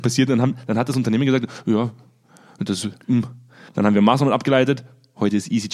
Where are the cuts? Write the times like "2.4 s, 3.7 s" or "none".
3.7 s